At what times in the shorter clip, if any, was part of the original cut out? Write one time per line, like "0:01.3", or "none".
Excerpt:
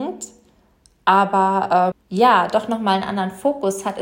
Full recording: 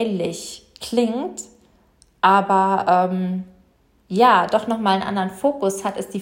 0:01.9

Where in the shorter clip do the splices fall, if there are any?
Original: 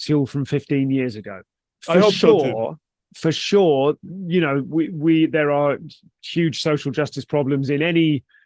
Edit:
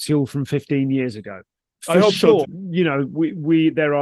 0:02.4

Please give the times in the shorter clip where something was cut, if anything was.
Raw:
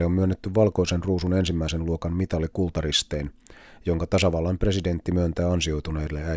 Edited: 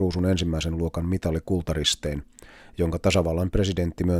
none

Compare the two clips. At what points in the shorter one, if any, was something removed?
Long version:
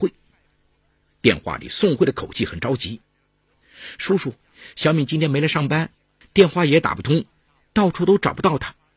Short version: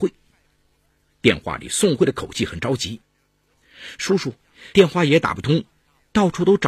0:04.7

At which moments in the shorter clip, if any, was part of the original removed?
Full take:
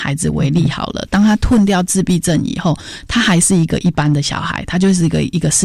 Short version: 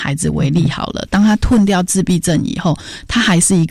none

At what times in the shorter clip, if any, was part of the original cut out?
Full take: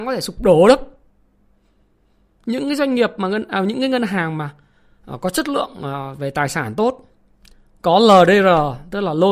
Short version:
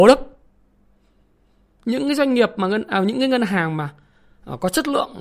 none

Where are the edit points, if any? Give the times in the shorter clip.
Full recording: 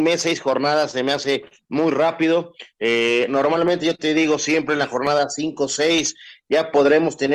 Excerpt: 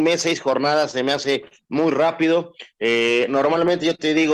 none

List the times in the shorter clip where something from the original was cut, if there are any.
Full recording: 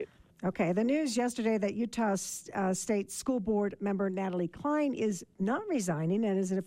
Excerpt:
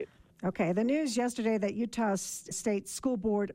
0:02.5

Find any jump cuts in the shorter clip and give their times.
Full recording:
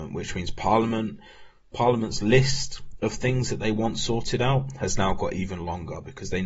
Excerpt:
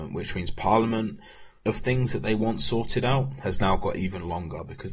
0:01.6

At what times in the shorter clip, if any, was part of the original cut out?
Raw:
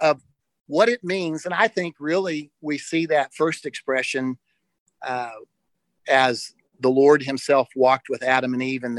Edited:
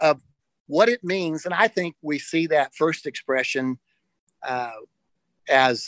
0:01.9

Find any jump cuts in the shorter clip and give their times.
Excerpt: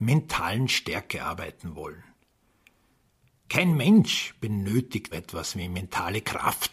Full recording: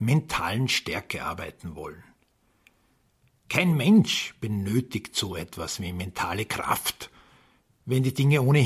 0:05.1

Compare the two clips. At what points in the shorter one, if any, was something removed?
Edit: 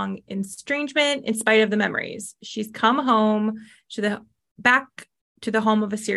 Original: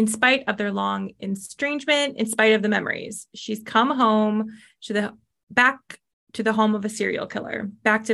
none

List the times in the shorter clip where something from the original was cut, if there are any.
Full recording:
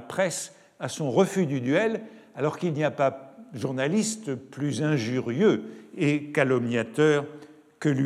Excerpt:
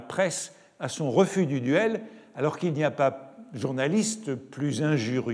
none

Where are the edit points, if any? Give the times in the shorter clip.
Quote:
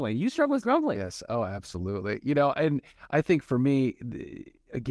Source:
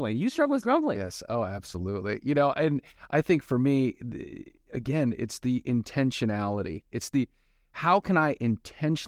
none

